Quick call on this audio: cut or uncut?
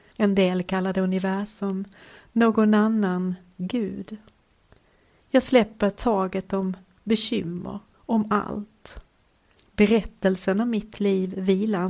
cut